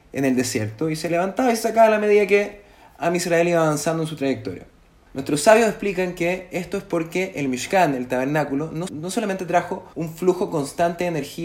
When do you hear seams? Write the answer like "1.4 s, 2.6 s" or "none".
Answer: 5.1 s, 8.9 s, 9.9 s